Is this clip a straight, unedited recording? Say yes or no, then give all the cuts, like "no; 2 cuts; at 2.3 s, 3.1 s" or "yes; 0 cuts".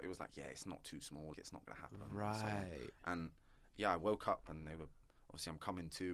no; 1 cut; at 1.3 s